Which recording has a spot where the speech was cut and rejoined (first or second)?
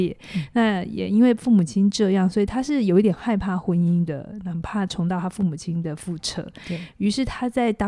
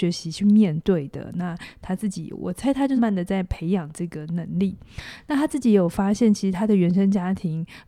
second